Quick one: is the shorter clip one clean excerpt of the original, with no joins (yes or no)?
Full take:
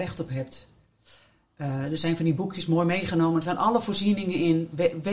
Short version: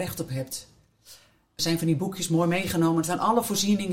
no